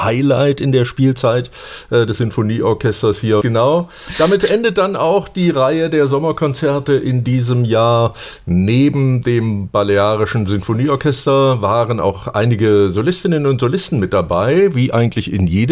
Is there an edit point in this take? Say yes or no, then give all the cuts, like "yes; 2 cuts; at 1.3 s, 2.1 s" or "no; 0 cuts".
yes; 1 cut; at 3.4 s